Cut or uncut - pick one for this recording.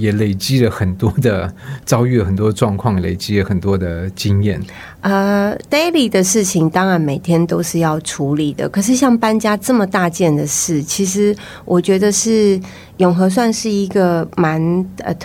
uncut